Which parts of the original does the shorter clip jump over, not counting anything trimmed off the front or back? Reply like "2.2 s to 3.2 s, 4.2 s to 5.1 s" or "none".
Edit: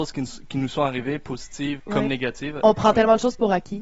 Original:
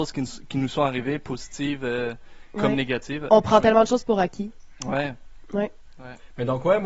1.8 s to 2.5 s